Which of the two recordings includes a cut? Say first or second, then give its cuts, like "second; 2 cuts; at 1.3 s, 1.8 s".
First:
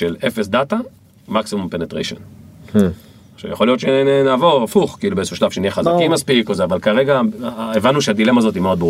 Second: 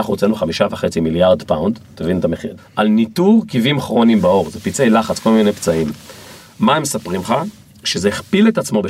second; 1 cut; at 2.6 s